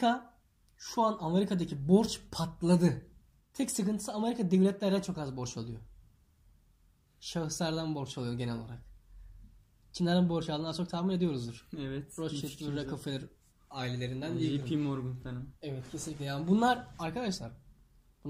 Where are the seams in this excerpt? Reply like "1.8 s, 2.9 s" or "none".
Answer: 3.4 s